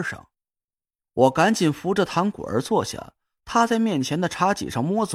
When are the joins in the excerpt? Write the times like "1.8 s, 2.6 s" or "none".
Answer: 1.0 s